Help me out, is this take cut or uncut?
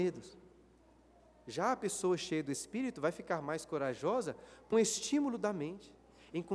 cut